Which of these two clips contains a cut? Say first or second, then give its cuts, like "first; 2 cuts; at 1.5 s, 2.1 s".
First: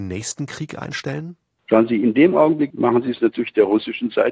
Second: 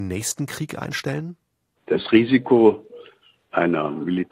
first; 2 cuts; at 1.6 s, 2.7 s